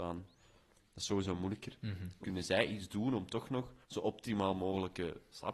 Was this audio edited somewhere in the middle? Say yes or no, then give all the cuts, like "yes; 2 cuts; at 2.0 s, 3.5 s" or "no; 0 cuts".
yes; 2 cuts; at 2.2 s, 3.8 s